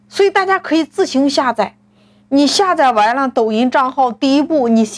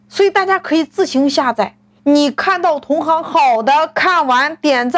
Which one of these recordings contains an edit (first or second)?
second